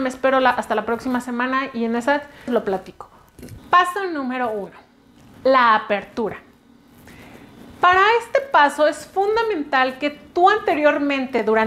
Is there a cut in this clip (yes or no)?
yes